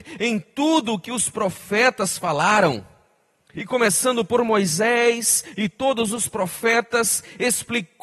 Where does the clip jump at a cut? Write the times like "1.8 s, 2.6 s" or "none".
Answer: 3.6 s